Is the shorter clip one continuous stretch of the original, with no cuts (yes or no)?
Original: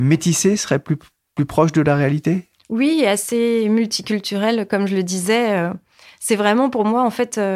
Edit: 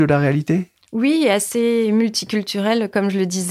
yes